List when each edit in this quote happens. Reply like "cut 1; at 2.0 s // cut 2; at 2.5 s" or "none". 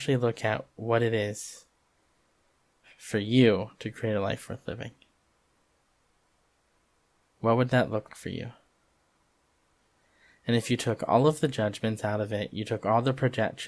cut 1; at 8.1 s